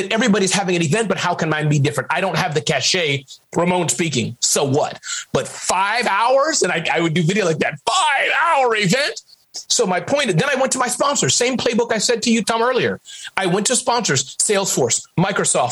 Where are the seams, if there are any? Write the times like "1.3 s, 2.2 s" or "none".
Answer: 12.4 s